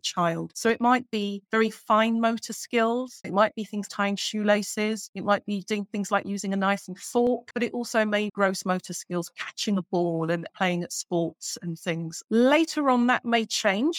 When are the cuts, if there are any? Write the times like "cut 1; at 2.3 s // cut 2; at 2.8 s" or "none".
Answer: cut 1; at 3.9 s

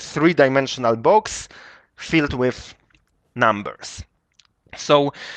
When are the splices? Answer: none

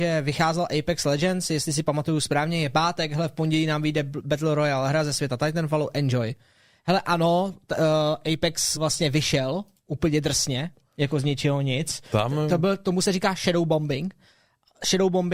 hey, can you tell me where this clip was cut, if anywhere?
cut 1; at 8.8 s

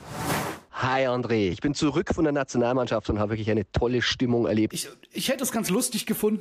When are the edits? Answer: cut 1; at 1.5 s // cut 2; at 4.7 s

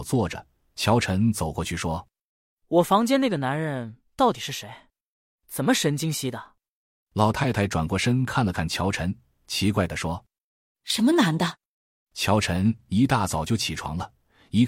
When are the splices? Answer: cut 1; at 6.1 s // cut 2; at 11.9 s

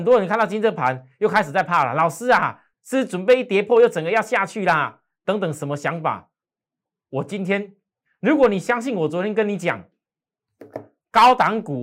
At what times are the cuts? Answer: cut 1; at 2.7 s

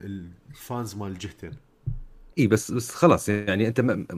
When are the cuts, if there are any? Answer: cut 1; at 2.3 s

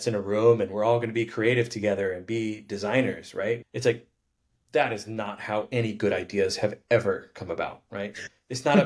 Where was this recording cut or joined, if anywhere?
cut 1; at 3.6 s

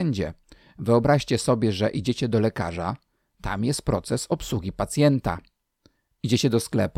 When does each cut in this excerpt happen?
none

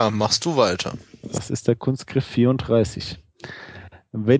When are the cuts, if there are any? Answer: none

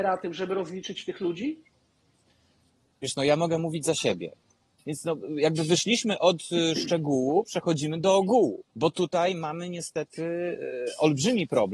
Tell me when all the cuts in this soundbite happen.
cut 1; at 4.8 s // cut 2; at 8.7 s

